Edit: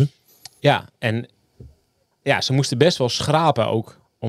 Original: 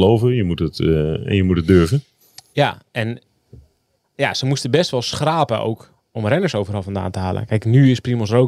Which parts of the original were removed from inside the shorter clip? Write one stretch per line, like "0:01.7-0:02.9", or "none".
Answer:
none